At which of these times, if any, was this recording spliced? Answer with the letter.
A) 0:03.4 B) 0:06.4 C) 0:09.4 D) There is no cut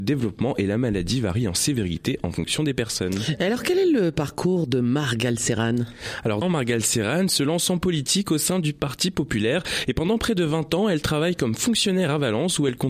B